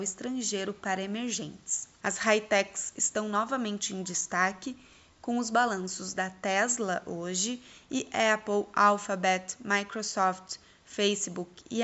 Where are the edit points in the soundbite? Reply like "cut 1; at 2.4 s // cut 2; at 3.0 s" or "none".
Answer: cut 1; at 2.0 s